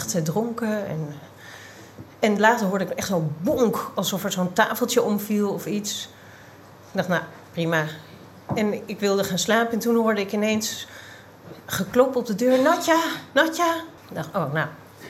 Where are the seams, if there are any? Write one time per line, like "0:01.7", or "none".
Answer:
0:14.0